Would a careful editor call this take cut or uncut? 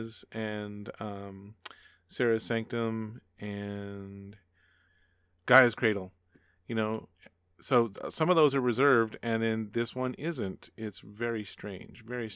uncut